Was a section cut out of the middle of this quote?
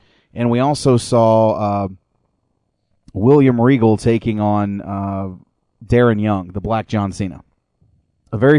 no; 0 cuts

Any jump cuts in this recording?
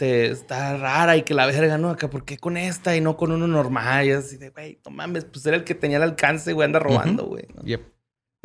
no; 0 cuts

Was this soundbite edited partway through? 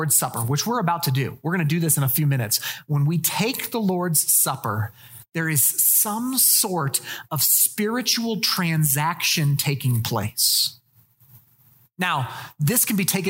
no; 0 cuts

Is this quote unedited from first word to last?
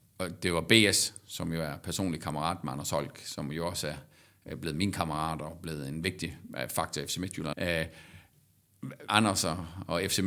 no; 2 cuts; at 7.5 s, 9.1 s

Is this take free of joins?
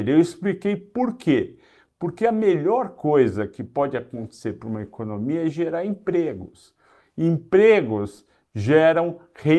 yes; 0 cuts

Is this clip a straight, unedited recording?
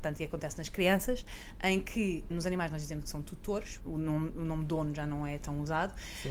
no; 2 cuts; at 2.3 s, 3.8 s

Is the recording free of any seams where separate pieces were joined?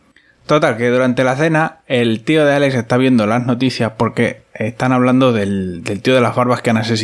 yes; 0 cuts

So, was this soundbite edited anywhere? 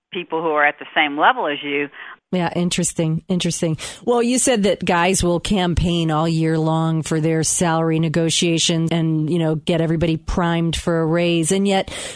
yes; 2 cuts; at 2.2 s, 8.9 s

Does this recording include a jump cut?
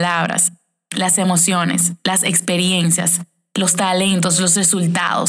no; 0 cuts

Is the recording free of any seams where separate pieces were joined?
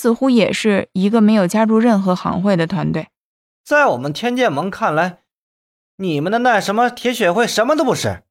no; 1 cut; at 3.5 s

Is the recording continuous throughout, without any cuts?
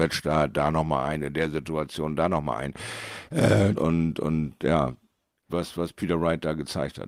no; 2 cuts; at 3.7 s, 5.5 s

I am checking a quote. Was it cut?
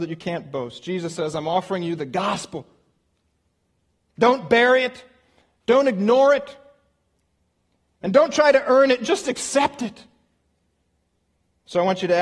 no; 0 cuts

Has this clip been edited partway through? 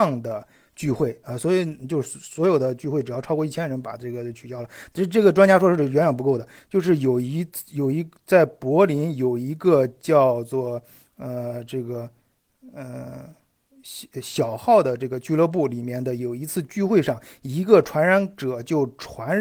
yes; 1 cut; at 6.6 s

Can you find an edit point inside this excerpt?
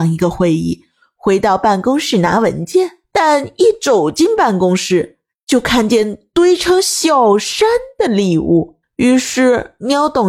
no; 0 cuts

